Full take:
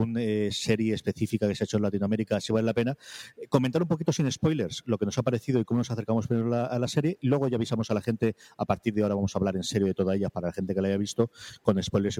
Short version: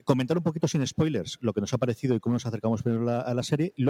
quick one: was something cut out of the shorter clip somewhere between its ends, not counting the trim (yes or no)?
no